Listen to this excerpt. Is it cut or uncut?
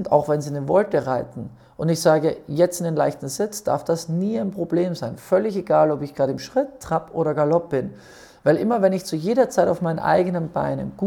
uncut